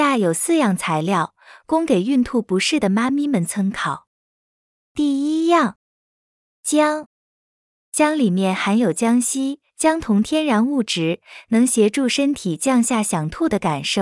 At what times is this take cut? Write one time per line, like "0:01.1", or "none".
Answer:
none